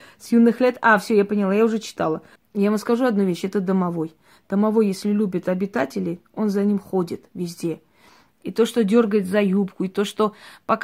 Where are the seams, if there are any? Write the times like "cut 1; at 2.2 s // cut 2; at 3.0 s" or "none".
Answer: cut 1; at 2.4 s